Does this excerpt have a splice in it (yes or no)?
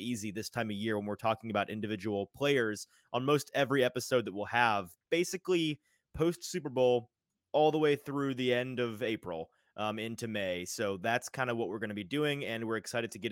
no